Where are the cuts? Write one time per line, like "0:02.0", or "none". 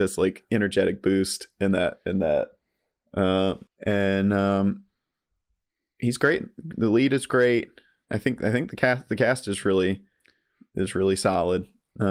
0:03.7